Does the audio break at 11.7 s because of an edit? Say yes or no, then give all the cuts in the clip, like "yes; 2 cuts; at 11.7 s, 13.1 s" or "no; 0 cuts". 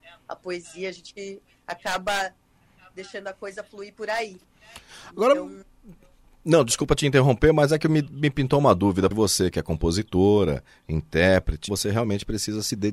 yes; 2 cuts; at 9.1 s, 11.7 s